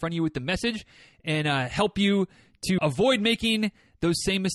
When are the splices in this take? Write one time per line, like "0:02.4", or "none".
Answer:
0:02.8